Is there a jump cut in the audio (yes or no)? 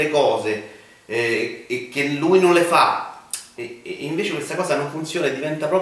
yes